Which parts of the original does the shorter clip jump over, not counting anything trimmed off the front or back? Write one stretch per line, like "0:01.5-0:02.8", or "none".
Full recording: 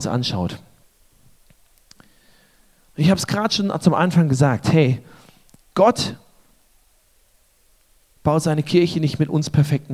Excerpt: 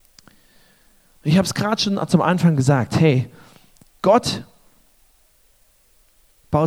none

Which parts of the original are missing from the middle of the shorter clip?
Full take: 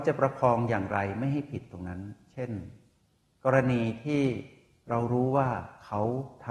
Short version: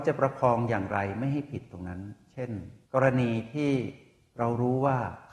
0:02.8-0:03.4

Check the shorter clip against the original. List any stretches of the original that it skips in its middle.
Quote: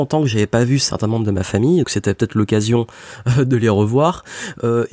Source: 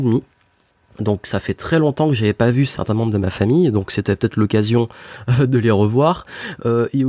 0:03.7-0:03.9

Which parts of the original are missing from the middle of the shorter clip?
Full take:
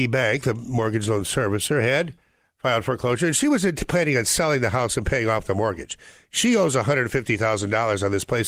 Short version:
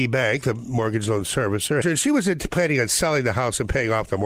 0:01.8-0:03.2

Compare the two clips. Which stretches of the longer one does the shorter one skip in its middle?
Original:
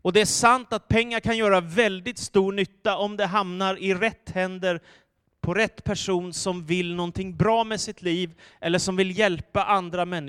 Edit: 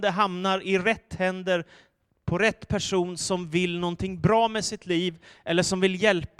none

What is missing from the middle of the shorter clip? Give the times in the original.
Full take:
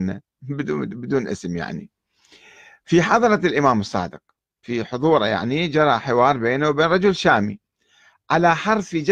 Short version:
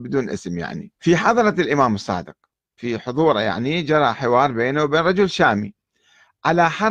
0:01.9-0:02.8

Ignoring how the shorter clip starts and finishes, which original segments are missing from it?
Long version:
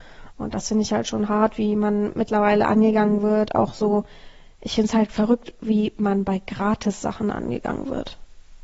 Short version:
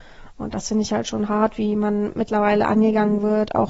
none

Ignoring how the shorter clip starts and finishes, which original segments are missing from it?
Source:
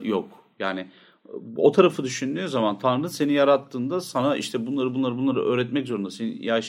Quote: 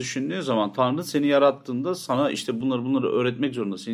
0:04.7-0:04.9

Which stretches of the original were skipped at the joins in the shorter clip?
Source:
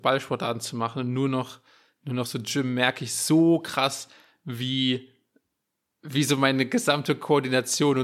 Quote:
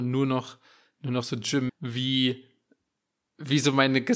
0:02.7-0:04.3

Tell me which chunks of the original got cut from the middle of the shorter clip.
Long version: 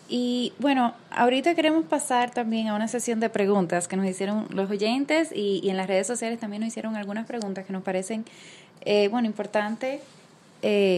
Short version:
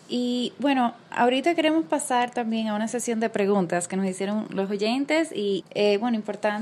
0:05.6-0:08.7

